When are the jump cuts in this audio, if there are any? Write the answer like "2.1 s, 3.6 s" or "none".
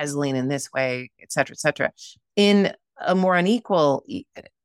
none